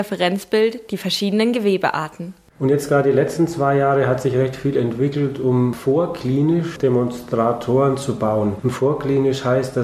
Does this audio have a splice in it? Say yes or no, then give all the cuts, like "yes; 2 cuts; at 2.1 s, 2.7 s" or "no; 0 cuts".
no; 0 cuts